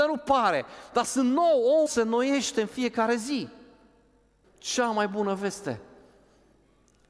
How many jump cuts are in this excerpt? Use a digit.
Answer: 2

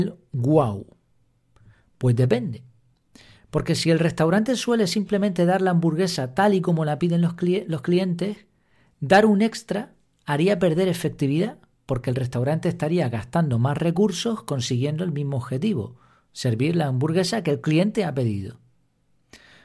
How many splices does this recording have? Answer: 0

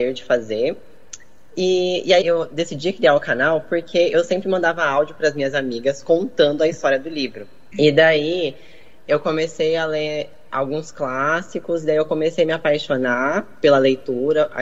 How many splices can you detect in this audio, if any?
2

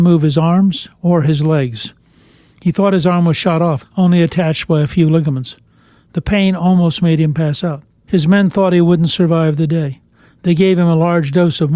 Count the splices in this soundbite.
2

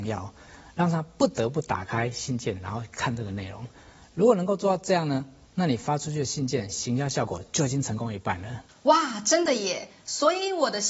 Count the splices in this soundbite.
0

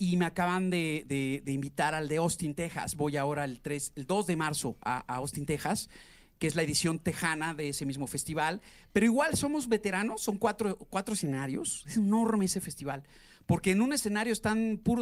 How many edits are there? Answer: 0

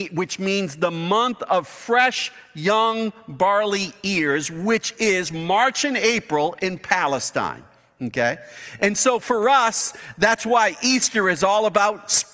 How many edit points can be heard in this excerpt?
0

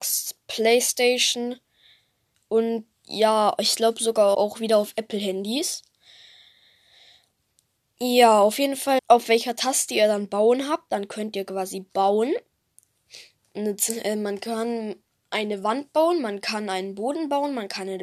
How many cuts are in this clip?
2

